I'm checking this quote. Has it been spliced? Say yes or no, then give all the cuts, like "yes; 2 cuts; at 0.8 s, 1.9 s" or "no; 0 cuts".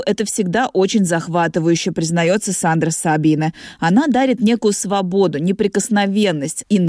no; 0 cuts